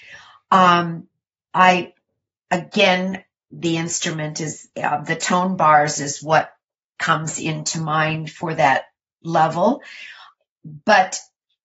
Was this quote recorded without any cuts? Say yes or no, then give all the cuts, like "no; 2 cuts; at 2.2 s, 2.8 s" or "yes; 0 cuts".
yes; 0 cuts